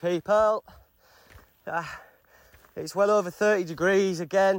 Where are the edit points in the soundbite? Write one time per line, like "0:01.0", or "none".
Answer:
none